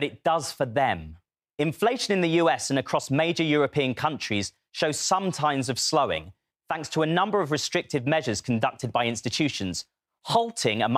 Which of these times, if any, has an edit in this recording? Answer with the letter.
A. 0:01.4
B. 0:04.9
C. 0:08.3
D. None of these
A